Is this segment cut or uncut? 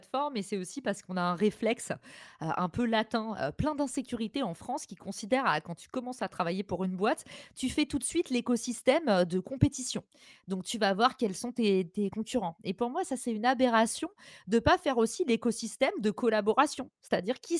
uncut